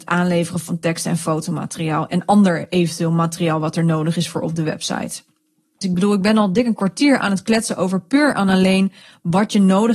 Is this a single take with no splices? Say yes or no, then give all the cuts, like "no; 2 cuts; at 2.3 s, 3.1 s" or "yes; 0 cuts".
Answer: no; 1 cut; at 5.8 s